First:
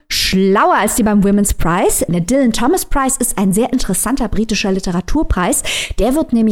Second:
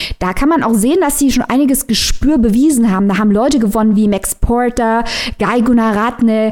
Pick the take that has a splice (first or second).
first